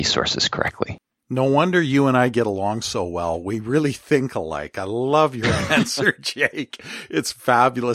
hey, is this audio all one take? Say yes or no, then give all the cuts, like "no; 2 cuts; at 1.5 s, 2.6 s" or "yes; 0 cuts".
yes; 0 cuts